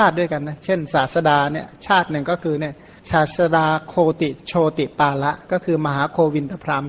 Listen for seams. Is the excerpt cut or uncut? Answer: cut